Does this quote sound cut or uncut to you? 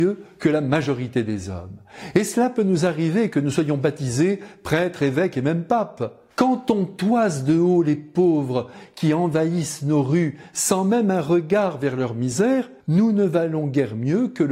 cut